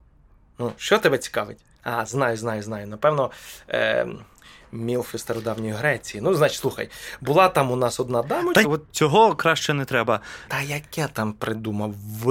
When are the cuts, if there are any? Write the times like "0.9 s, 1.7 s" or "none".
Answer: 8.6 s, 10.5 s